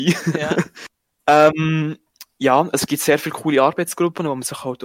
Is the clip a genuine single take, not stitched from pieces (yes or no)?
yes